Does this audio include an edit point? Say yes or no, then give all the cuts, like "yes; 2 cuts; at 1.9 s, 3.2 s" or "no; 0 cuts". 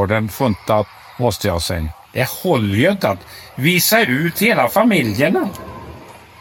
yes; 1 cut; at 2.0 s